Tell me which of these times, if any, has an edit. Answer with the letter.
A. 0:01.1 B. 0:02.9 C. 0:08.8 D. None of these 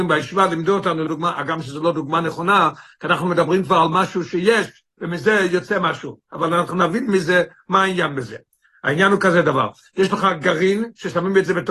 A